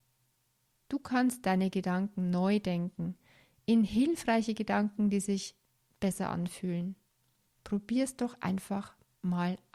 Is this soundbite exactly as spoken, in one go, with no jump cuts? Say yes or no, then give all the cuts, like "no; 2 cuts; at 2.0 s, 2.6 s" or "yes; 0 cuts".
yes; 0 cuts